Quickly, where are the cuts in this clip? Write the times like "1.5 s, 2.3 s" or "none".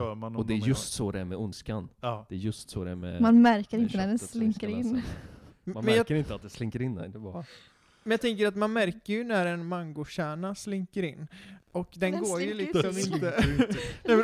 none